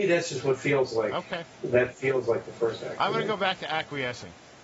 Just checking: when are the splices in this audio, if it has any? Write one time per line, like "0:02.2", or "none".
0:01.5